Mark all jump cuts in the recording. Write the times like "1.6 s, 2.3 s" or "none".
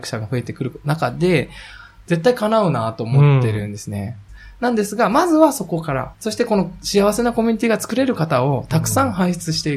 4.3 s, 6.1 s